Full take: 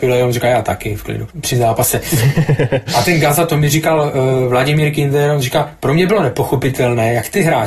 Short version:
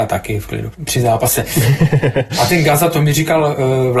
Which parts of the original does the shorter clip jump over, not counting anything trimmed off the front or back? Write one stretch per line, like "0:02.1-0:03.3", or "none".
none